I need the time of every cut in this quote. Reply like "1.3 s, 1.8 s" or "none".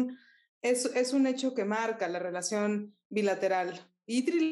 none